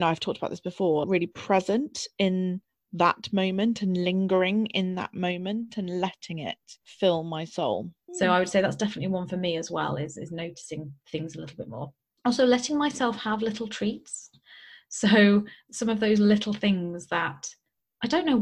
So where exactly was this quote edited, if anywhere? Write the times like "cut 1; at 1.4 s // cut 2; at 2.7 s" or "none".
cut 1; at 1.0 s // cut 2; at 8.1 s